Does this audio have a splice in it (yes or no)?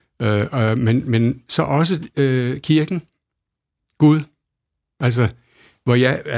no